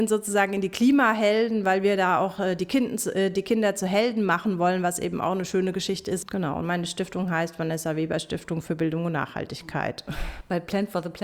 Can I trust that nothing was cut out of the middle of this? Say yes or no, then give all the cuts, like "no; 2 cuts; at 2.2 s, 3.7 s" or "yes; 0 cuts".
no; 1 cut; at 6.2 s